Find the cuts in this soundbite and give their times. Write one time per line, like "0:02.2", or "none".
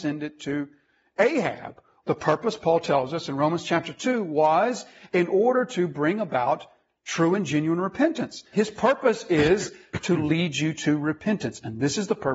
0:02.0
0:08.5

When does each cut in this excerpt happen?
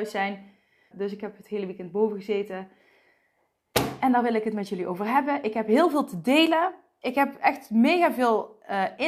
0:00.9

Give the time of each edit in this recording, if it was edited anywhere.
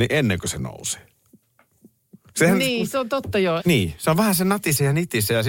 0:03.6

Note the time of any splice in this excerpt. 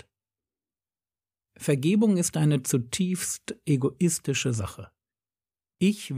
0:01.5

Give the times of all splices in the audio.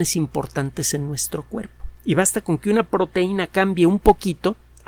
none

